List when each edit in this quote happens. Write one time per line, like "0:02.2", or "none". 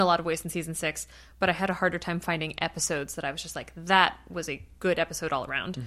none